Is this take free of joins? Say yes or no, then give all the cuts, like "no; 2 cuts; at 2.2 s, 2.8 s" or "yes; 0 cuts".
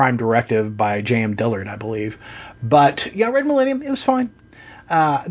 yes; 0 cuts